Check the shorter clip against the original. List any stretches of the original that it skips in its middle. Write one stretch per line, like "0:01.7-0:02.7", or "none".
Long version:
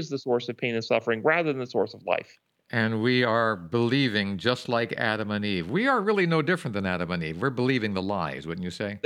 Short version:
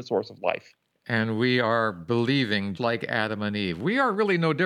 0:04.4-0:04.7